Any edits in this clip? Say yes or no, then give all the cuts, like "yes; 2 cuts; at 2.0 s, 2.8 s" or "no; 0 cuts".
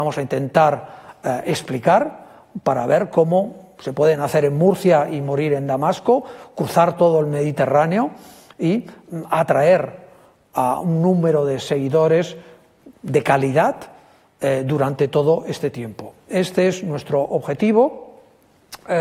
no; 0 cuts